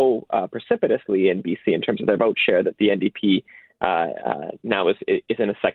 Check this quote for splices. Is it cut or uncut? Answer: uncut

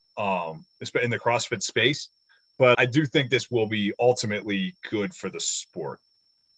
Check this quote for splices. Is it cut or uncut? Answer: cut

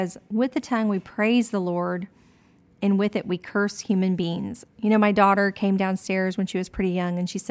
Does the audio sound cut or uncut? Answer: uncut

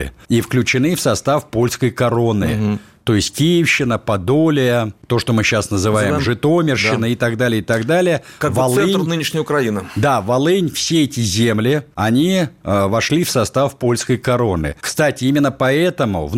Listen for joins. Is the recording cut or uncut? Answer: uncut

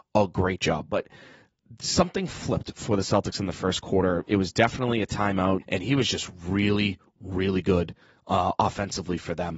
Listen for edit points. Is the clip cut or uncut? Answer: cut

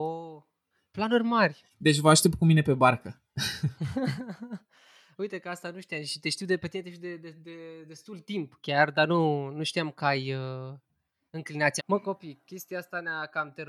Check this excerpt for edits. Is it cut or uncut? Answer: cut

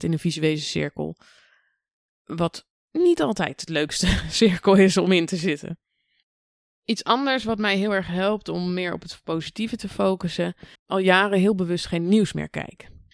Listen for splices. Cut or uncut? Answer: cut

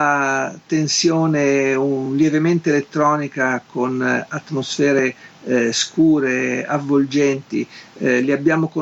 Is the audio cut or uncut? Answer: uncut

